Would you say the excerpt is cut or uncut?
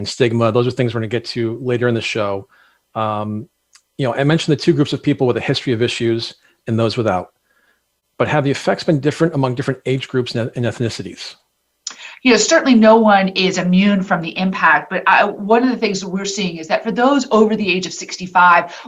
uncut